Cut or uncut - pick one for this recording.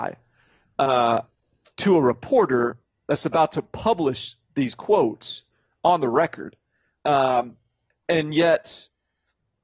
uncut